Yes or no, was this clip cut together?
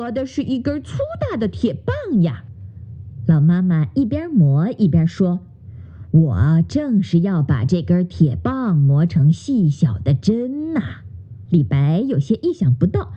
yes